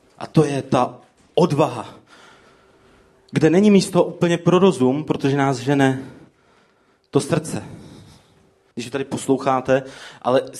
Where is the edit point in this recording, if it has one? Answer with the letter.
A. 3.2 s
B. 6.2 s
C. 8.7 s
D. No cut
C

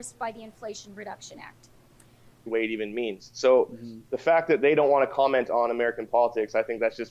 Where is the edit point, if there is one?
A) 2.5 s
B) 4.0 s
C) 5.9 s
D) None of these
A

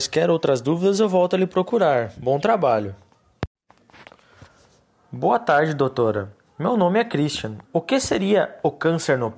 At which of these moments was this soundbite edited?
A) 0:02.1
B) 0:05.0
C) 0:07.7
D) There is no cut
C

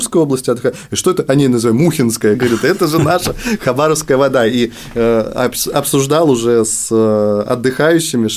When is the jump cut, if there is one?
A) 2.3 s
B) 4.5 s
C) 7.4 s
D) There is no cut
A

